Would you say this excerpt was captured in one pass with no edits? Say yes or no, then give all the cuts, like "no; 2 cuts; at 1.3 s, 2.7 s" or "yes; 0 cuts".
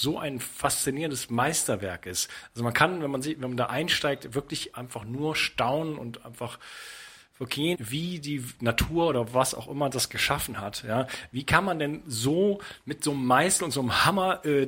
no; 1 cut; at 7.7 s